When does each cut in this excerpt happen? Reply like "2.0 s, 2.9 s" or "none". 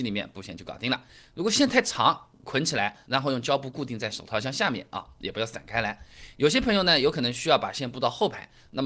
none